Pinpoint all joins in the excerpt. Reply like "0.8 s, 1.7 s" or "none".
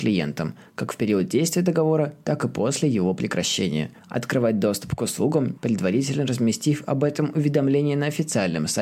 4.0 s, 5.6 s